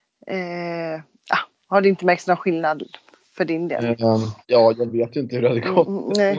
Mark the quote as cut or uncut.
cut